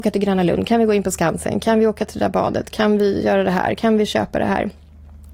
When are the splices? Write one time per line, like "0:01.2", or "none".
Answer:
none